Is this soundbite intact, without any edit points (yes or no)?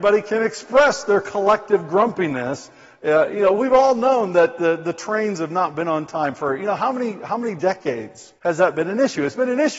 no